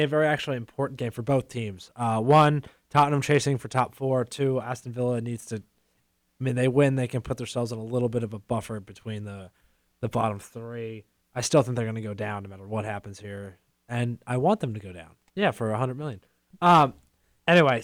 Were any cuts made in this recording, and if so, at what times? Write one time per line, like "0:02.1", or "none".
0:15.3